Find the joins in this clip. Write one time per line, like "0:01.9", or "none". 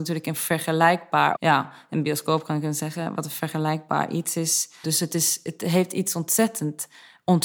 0:01.3
0:04.8